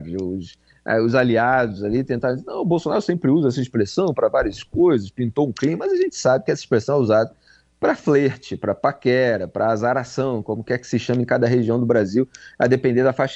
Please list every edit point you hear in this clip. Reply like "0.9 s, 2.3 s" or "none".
none